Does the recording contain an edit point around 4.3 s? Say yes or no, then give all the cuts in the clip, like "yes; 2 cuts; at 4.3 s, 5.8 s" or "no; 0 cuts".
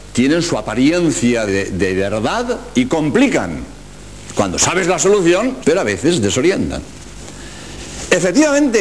no; 2 cuts; at 1.5 s, 5.6 s